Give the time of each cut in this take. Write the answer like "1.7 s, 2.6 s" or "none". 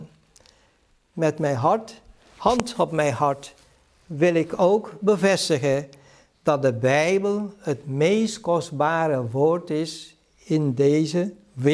none